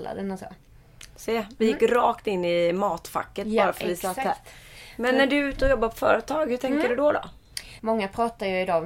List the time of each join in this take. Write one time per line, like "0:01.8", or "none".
0:07.8